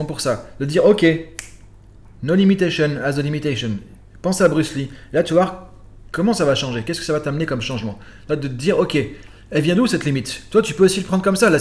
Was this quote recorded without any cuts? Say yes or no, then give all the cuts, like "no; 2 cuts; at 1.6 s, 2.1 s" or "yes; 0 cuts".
yes; 0 cuts